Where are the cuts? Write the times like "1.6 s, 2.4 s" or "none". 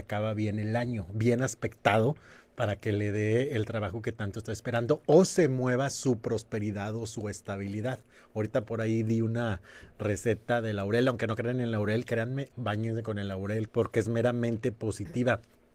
12.5 s, 13.7 s